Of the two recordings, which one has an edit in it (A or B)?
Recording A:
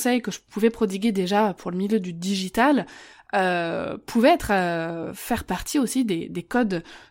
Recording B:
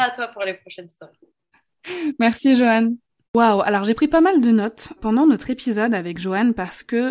B